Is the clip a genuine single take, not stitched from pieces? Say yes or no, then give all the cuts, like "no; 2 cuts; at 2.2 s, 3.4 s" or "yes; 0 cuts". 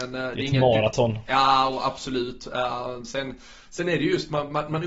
yes; 0 cuts